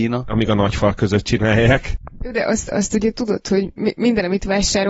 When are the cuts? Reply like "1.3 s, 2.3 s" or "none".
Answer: 3.8 s